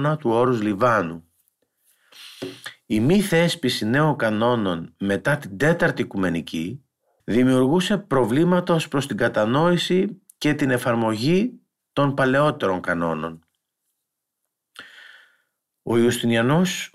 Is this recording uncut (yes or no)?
no